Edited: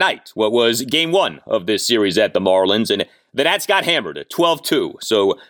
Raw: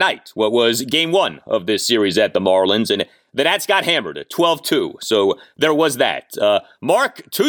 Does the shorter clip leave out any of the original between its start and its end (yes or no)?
no